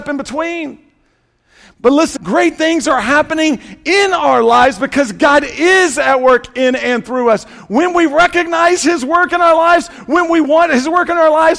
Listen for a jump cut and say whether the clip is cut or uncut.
cut